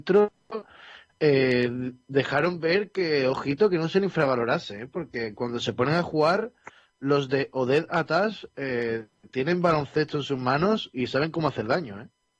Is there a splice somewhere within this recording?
no; 0 cuts

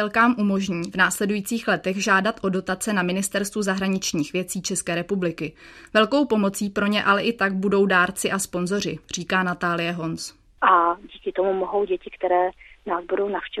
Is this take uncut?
no; 1 cut; at 10.6 s

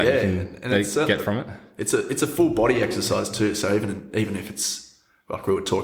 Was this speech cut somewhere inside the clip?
no; 0 cuts

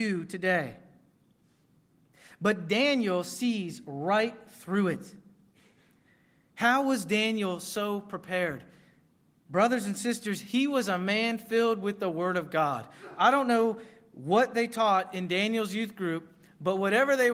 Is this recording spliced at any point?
no; 0 cuts

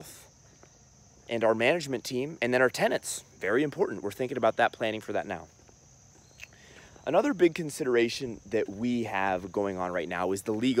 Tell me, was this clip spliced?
no; 0 cuts

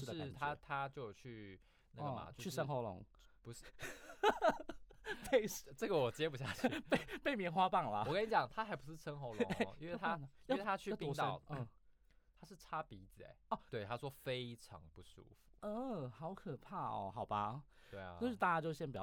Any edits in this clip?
yes; 2 cuts; at 11.5 s, 13.7 s

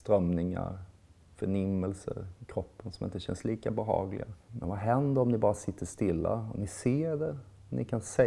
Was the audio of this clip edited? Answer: yes; 1 cut; at 4.5 s

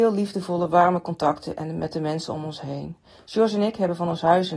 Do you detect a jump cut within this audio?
no; 0 cuts

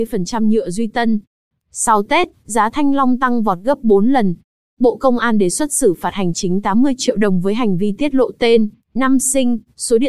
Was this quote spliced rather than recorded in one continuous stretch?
yes; 2 cuts; at 1.5 s, 4.7 s

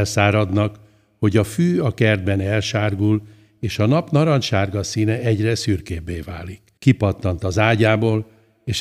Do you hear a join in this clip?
yes; 1 cut; at 6.8 s

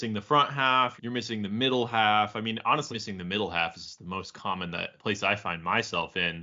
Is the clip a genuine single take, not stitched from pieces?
no; 2 cuts; at 1.0 s, 2.9 s

